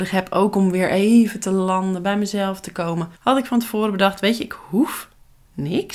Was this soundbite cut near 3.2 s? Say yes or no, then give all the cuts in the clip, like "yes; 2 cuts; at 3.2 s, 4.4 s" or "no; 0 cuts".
yes; 1 cut; at 3.2 s